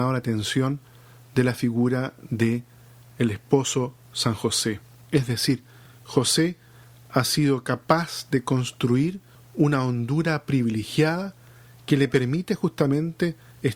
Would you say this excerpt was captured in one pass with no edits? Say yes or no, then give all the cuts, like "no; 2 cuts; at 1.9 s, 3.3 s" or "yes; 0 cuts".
no; 1 cut; at 5.0 s